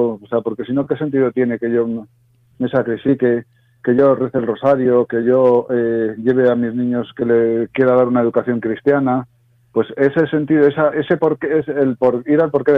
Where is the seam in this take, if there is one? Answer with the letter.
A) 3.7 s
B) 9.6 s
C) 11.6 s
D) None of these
D